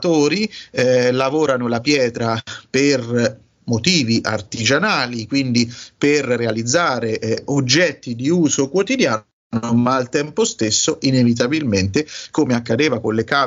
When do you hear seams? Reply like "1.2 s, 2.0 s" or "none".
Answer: none